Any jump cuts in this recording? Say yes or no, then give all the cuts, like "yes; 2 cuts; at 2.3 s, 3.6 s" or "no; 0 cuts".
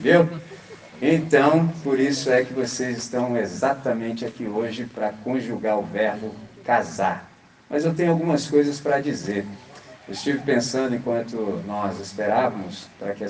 no; 0 cuts